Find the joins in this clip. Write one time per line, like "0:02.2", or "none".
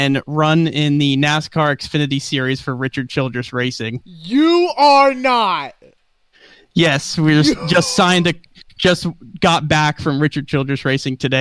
none